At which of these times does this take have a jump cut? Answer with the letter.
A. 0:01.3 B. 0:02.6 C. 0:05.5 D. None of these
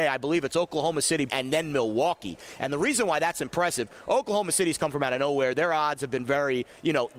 A